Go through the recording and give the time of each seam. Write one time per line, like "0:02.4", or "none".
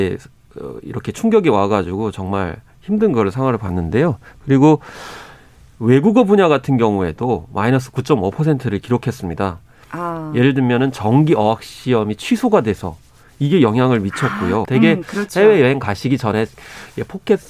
0:14.6